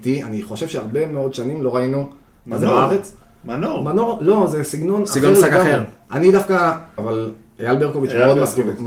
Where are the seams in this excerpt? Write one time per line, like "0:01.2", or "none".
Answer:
0:07.0